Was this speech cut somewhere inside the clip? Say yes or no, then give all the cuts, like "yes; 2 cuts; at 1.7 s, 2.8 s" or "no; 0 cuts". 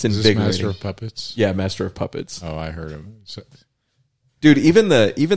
no; 0 cuts